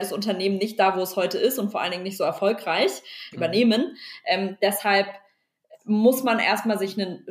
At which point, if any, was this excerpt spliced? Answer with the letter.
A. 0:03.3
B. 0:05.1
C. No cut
A